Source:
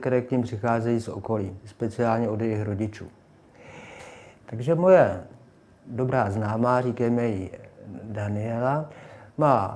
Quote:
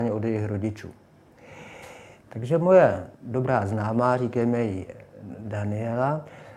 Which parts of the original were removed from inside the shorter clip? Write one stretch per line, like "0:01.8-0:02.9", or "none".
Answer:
0:05.3-0:05.8